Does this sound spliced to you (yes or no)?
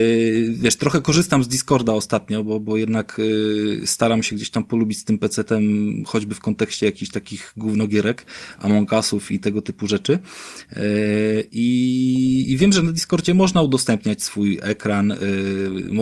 no